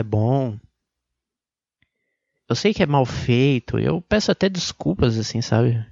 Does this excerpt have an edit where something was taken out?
no; 0 cuts

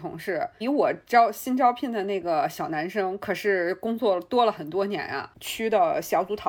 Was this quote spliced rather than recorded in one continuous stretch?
yes; 1 cut; at 5.3 s

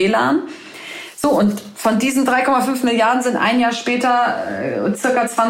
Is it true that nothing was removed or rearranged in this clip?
yes; 0 cuts

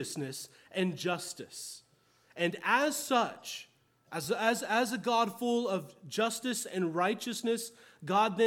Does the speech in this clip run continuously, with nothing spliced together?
yes; 0 cuts

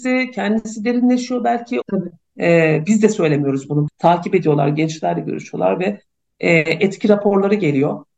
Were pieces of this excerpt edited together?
yes; 2 cuts; at 1.8 s, 3.9 s

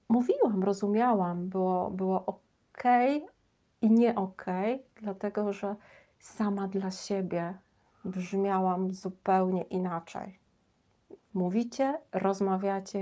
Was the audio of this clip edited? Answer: yes; 1 cut; at 11.2 s

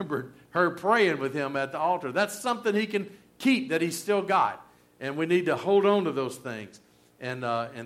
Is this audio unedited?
yes; 0 cuts

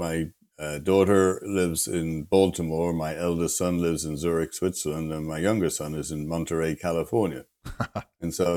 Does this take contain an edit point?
no; 0 cuts

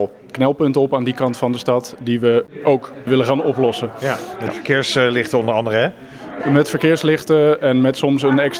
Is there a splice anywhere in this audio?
no; 0 cuts

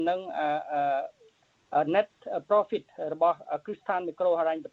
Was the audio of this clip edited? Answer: no; 0 cuts

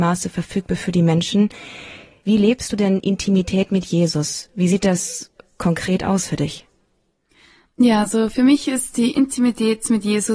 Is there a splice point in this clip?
no; 0 cuts

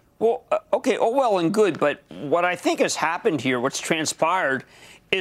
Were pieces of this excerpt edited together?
no; 0 cuts

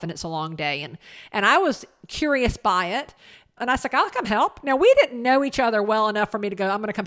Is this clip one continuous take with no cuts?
no; 1 cut; at 3.6 s

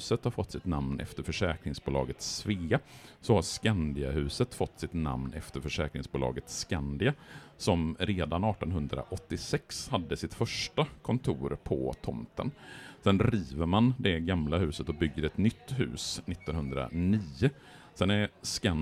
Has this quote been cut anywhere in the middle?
no; 0 cuts

